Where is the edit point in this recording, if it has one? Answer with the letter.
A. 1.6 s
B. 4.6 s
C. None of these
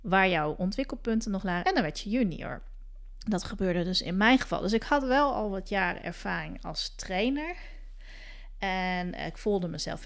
A